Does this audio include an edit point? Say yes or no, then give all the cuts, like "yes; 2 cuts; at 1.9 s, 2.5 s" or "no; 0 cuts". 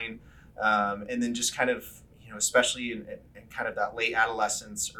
no; 0 cuts